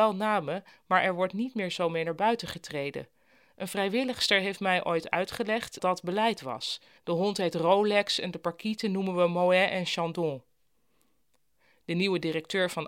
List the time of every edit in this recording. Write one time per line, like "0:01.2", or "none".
0:05.8
0:07.0